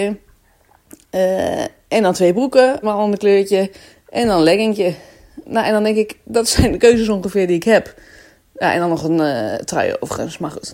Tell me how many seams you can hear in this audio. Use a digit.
2